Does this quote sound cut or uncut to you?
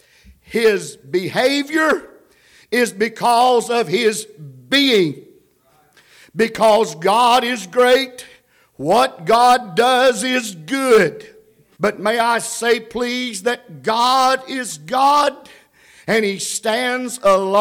cut